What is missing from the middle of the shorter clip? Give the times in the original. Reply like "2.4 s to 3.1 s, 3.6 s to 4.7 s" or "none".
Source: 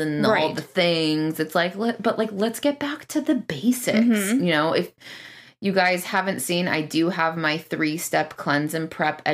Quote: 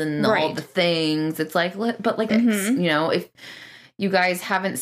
2.3 s to 3.9 s